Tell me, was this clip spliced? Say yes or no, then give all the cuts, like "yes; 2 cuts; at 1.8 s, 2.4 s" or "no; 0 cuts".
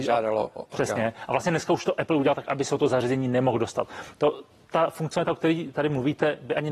no; 0 cuts